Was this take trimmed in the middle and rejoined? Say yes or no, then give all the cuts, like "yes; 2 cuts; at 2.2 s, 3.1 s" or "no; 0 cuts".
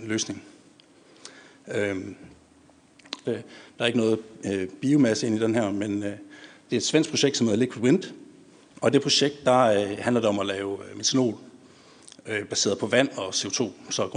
yes; 1 cut; at 3.2 s